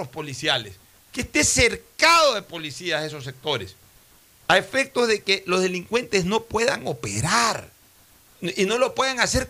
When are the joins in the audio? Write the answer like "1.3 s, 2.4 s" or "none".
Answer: none